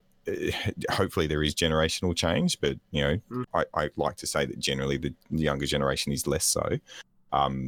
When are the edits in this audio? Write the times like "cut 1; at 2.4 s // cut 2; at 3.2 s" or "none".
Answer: cut 1; at 3.4 s

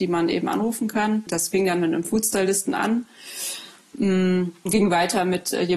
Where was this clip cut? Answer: cut 1; at 1.3 s

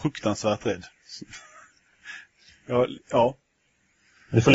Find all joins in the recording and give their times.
cut 1; at 3.0 s

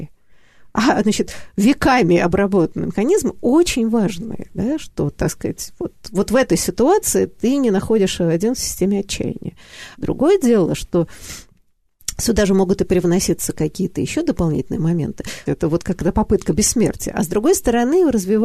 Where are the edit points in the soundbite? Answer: cut 1; at 10.0 s // cut 2; at 15.5 s

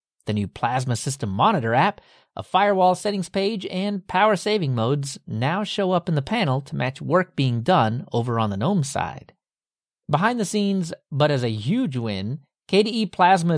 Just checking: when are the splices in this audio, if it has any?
none

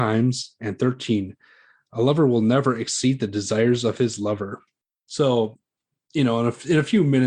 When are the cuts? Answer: none

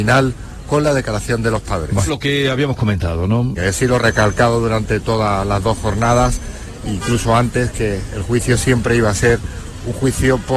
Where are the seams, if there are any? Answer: cut 1; at 2.1 s // cut 2; at 3.6 s

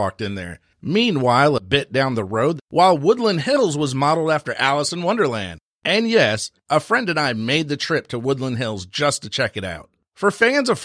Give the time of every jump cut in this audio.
cut 1; at 2.6 s

